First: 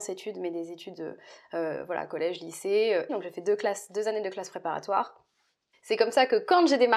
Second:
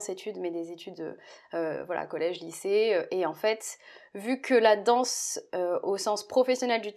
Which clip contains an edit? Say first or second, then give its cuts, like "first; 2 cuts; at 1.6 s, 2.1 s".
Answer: first; 2 cuts; at 3.1 s, 5.7 s